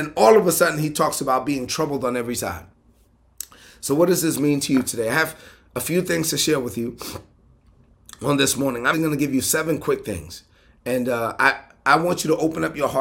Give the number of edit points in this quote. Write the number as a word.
one